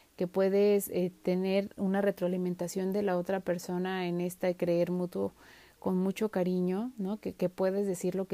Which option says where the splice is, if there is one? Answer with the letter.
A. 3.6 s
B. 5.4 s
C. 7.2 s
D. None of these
D